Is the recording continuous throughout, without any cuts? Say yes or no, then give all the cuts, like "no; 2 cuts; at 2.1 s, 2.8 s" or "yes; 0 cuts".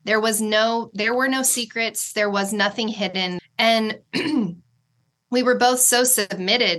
no; 1 cut; at 3.4 s